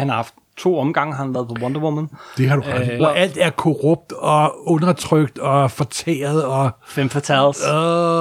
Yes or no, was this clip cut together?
yes